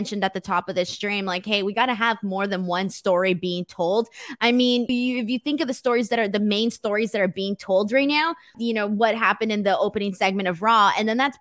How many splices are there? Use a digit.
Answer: 2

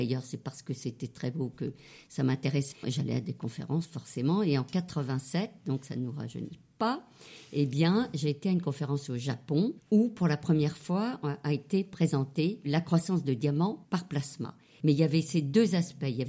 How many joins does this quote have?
2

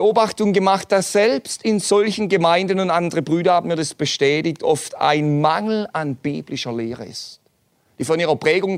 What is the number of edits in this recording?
0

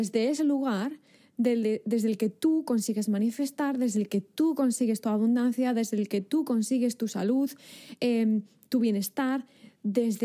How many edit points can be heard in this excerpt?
0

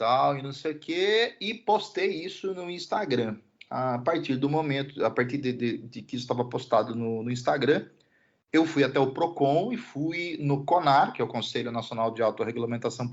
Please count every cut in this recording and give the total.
0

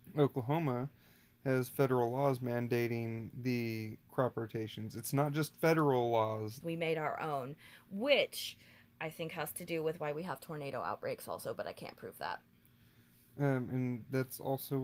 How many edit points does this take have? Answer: 1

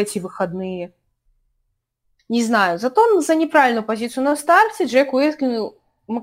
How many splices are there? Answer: 0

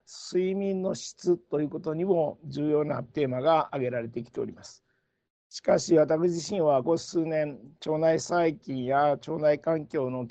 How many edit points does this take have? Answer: 1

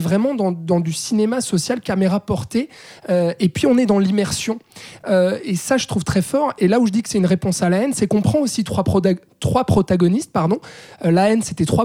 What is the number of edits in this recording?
0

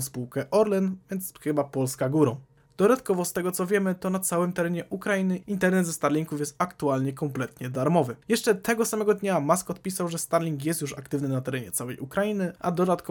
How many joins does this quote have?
1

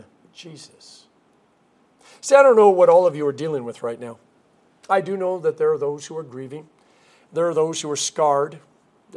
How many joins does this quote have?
0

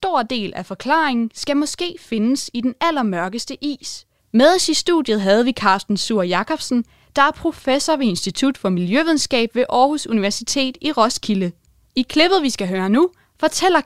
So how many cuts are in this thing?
1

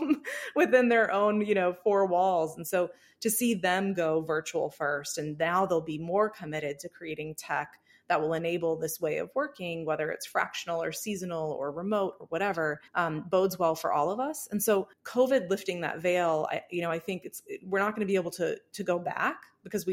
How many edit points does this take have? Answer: 2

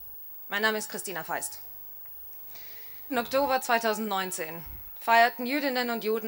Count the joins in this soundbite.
1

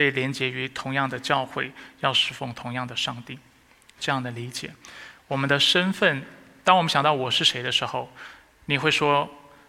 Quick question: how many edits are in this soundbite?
0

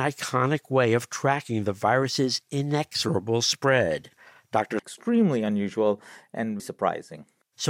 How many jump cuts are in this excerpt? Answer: 2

